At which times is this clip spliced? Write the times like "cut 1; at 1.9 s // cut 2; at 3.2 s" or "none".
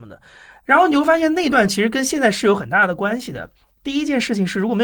none